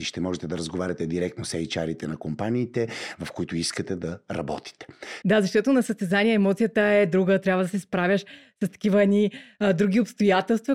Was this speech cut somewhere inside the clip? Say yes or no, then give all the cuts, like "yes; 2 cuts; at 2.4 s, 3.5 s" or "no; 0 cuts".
yes; 1 cut; at 5.2 s